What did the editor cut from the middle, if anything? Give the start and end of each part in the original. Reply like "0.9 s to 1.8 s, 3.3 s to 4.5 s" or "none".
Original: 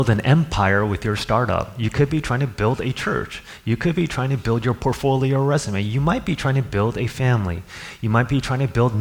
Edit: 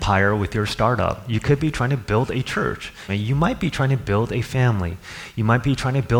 3.6 s to 5.7 s